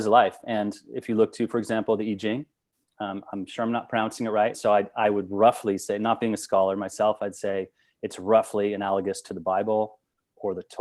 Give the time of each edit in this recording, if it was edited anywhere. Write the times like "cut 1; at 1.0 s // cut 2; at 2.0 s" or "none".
cut 1; at 4.5 s